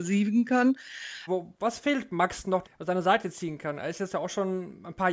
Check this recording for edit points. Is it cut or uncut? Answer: cut